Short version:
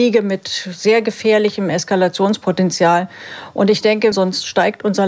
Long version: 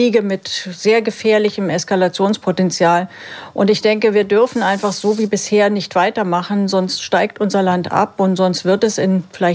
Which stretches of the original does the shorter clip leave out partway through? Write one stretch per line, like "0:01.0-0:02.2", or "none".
0:04.1-0:06.7